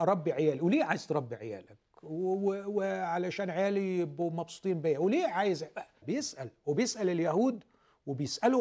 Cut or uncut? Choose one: cut